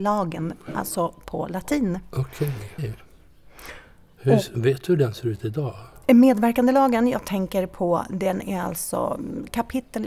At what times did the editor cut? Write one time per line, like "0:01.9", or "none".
0:02.8
0:04.5